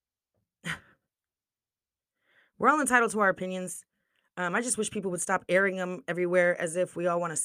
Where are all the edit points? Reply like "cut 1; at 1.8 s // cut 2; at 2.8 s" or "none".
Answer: none

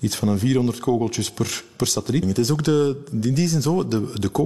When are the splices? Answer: cut 1; at 2.2 s

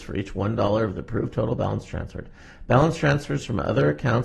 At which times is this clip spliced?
none

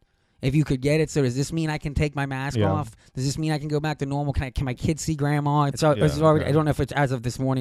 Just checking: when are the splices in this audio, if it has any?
cut 1; at 5.7 s

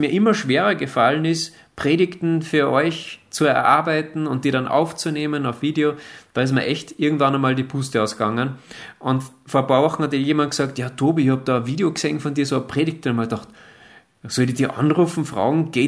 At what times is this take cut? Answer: none

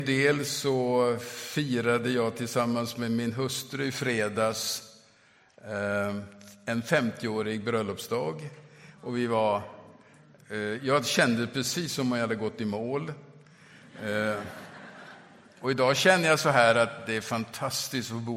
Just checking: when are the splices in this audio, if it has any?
none

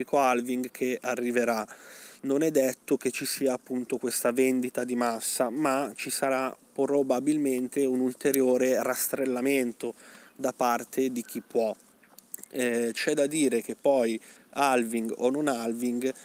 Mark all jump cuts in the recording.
none

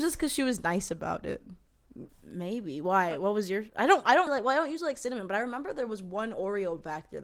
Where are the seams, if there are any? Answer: cut 1; at 2.1 s // cut 2; at 4.3 s

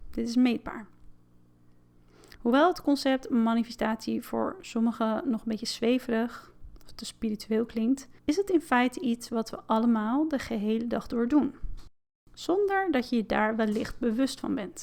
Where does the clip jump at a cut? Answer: cut 1; at 2.4 s // cut 2; at 8.2 s

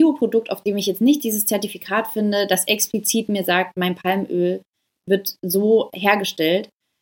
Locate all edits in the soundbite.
none

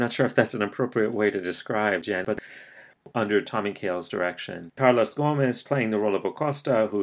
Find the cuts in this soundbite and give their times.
cut 1; at 4.7 s

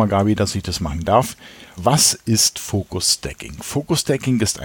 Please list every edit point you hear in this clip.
cut 1; at 1.8 s

